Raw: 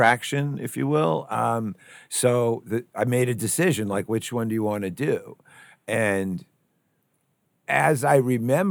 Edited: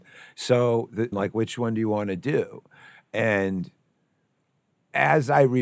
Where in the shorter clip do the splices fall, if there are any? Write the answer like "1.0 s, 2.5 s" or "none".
1.1 s